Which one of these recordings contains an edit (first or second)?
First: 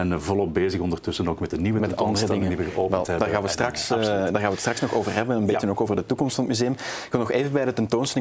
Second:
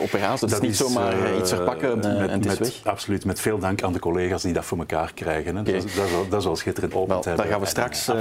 second